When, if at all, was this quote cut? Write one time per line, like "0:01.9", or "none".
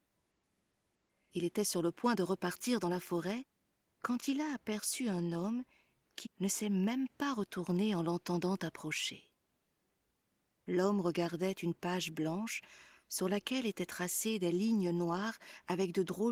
0:06.2